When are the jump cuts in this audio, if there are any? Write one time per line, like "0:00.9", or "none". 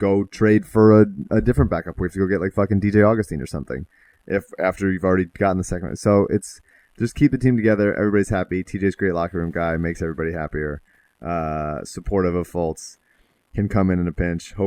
none